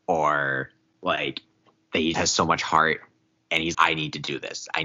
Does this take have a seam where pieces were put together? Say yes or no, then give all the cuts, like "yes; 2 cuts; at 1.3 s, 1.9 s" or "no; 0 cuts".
yes; 2 cuts; at 2.1 s, 3.7 s